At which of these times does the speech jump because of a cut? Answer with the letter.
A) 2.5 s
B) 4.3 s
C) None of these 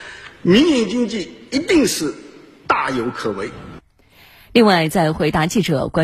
C